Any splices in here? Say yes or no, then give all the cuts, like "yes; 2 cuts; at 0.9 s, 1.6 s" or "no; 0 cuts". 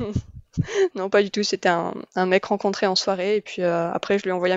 no; 0 cuts